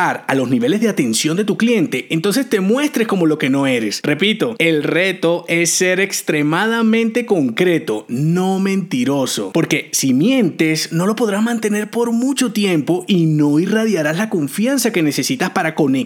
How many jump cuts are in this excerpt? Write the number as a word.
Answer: zero